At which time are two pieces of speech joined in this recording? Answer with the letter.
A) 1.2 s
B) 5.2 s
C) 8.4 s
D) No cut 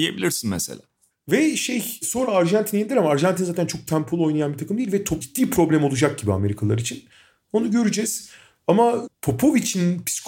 B